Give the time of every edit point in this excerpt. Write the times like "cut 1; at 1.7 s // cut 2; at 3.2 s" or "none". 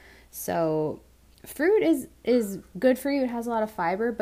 none